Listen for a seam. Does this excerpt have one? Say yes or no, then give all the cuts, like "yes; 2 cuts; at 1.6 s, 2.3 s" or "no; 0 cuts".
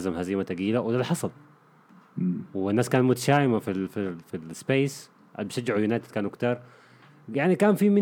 no; 0 cuts